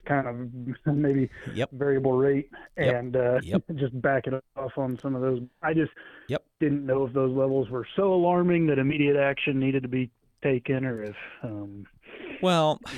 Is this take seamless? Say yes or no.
yes